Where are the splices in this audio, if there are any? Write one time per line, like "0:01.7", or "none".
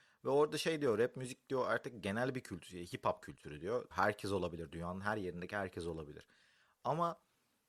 0:03.9

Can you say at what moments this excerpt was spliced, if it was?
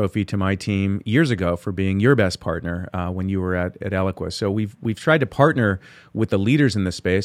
none

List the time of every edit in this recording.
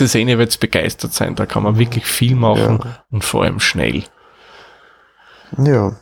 none

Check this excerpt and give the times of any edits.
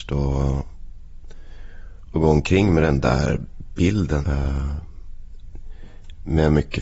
0:04.2

